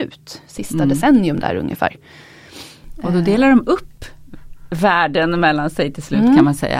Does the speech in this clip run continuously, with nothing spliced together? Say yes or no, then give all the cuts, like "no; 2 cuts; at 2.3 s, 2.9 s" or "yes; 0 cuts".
yes; 0 cuts